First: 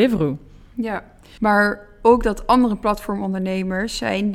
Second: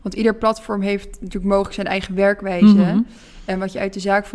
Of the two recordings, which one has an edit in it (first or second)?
first